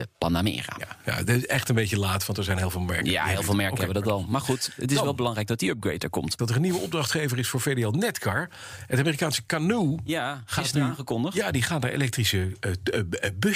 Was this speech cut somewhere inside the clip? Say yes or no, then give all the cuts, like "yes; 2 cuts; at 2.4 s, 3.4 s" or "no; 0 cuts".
yes; 1 cut; at 6.4 s